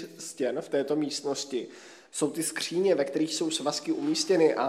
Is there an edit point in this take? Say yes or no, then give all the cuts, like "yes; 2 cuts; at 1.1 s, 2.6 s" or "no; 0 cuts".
no; 0 cuts